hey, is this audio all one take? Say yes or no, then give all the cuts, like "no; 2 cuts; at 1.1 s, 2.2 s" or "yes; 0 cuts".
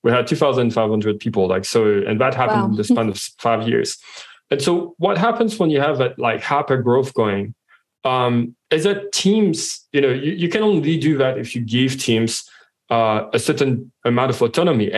yes; 0 cuts